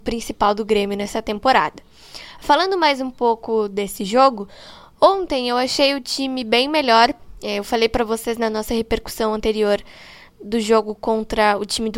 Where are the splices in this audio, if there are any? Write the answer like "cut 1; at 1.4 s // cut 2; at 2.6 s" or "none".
none